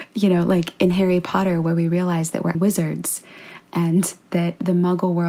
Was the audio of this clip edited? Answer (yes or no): yes